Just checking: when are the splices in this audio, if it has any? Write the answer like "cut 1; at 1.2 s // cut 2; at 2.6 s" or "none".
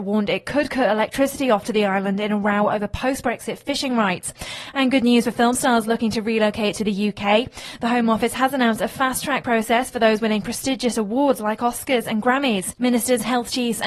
cut 1; at 12.8 s